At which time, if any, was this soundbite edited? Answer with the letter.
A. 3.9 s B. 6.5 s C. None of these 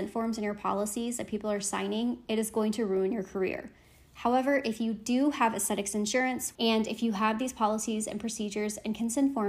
B